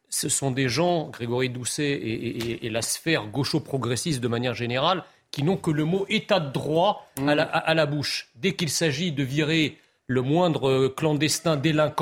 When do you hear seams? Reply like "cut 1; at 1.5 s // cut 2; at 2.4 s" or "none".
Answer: none